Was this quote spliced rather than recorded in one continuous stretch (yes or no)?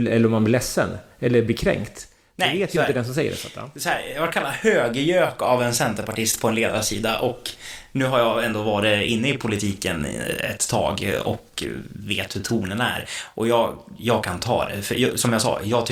no